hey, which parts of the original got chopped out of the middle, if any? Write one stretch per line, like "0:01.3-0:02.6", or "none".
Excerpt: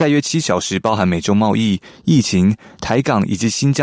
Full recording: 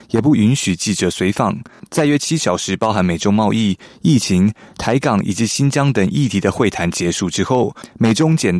none